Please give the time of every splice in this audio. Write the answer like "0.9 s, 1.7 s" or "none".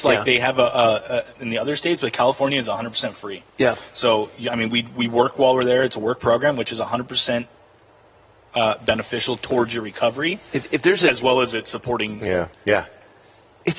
1.4 s, 12.5 s

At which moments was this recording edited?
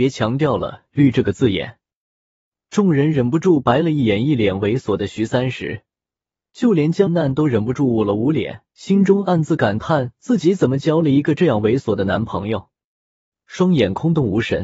7.1 s, 8.7 s, 13.3 s

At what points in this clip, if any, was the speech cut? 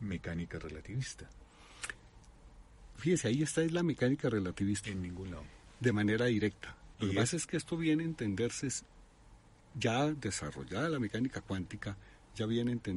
4.8 s, 6.9 s

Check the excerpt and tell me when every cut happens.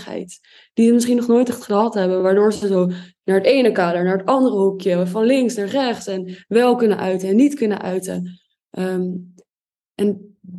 none

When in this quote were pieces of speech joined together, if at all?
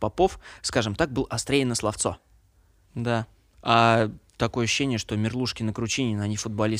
2.9 s

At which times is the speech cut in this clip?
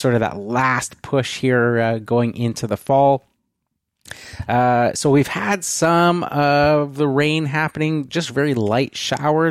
none

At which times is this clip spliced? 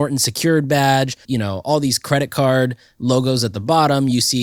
1.2 s

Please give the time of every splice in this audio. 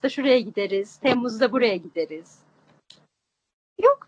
none

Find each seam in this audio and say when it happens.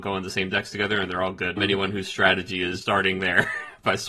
1.6 s, 2.8 s

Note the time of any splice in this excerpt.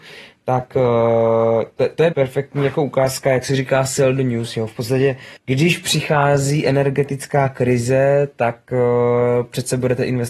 2.1 s, 5.4 s

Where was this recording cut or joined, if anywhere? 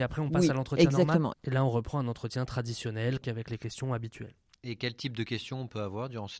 1.3 s, 3.2 s

